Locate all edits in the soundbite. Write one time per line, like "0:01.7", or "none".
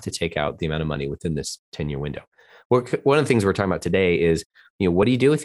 none